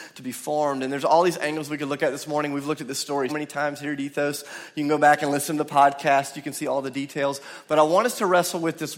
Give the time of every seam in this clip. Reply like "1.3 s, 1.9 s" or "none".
3.3 s

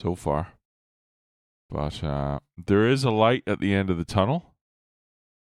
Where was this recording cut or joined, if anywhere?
none

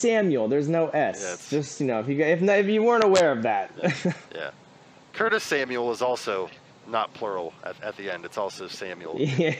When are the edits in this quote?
none

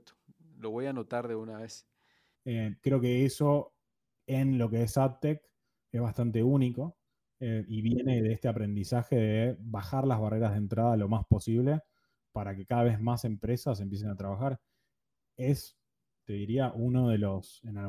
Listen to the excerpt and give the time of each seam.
2.3 s

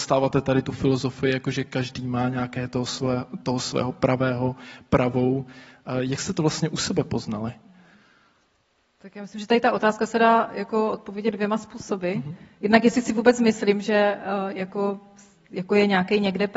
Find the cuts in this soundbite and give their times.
none

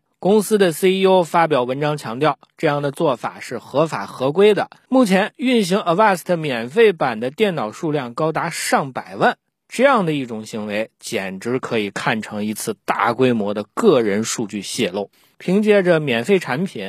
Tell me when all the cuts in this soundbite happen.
4.9 s, 15.3 s

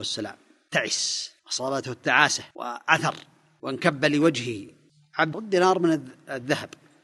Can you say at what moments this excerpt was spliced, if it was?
1.4 s, 2.5 s, 5.3 s

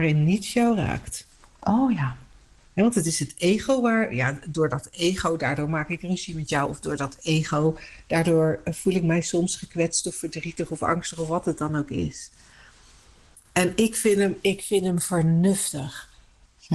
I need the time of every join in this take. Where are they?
none

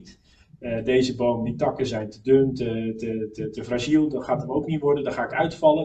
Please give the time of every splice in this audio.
none

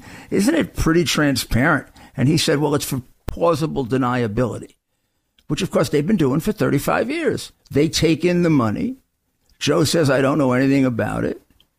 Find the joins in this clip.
7.6 s

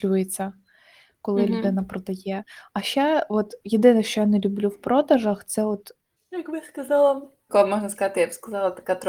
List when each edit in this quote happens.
6.2 s, 7.5 s

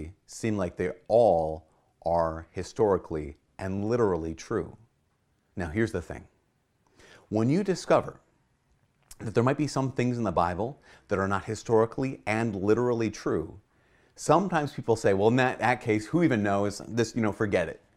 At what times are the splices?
none

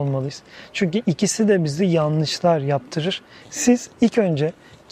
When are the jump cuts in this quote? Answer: 3.4 s

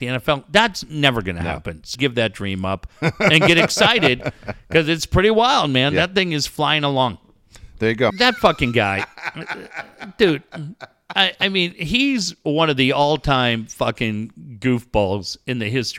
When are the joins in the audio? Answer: 1.9 s, 8.1 s

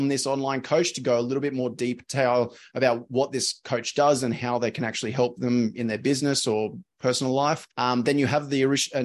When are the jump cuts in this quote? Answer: 7.7 s

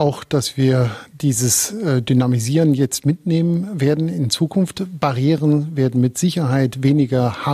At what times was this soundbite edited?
none

